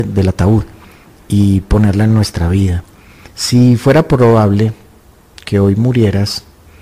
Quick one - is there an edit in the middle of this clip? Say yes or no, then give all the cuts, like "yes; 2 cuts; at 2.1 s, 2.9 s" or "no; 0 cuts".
yes; 1 cut; at 3.3 s